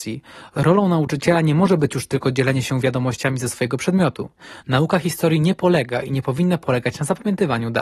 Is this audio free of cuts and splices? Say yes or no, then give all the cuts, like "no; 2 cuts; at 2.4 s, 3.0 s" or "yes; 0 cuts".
no; 1 cut; at 4.6 s